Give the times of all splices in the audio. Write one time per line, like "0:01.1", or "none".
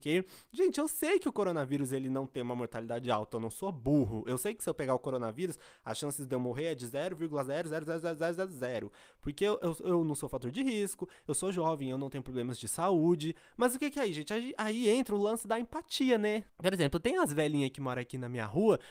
0:16.5